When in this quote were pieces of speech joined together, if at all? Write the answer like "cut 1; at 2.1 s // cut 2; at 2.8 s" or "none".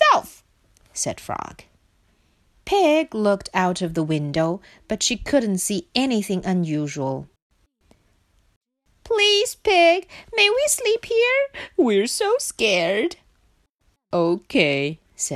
none